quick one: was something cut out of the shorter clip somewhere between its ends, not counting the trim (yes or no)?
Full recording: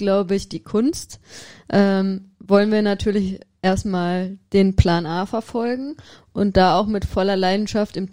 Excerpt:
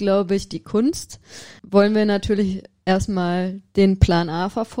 yes